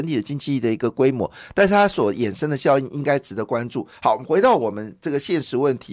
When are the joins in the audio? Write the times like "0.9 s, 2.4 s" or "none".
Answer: none